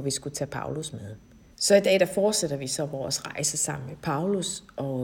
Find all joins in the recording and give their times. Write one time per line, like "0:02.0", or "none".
0:01.5